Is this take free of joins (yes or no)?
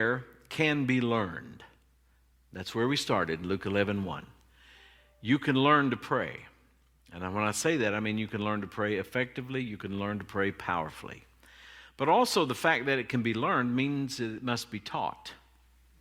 yes